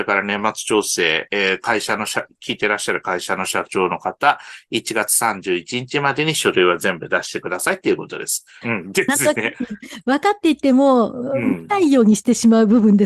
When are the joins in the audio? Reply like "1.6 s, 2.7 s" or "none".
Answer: 8.6 s